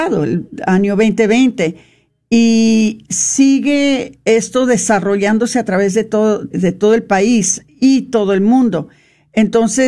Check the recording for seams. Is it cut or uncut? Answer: cut